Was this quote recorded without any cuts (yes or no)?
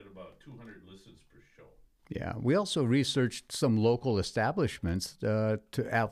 no